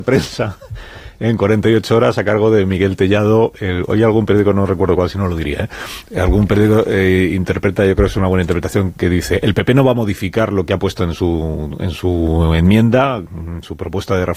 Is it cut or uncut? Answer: uncut